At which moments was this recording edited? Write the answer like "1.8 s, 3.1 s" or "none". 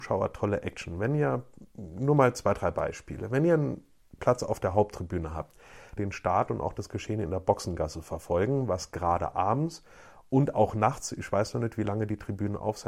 6.0 s